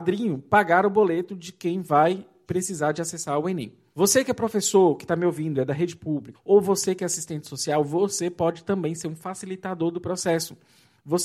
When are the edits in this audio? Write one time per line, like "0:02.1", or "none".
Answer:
0:03.9
0:06.3